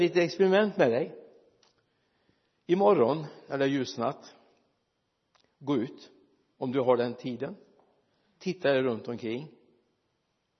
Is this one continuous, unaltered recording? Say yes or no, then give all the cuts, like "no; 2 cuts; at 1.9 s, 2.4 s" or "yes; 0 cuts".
yes; 0 cuts